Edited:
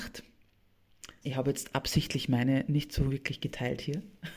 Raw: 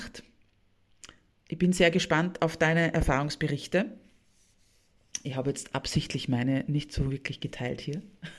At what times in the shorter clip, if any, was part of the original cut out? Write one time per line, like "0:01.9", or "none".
0:01.2